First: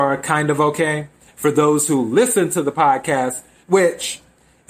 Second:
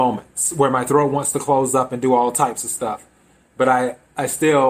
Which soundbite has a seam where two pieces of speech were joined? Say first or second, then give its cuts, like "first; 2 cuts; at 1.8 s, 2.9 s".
first; 2 cuts; at 1.3 s, 3.6 s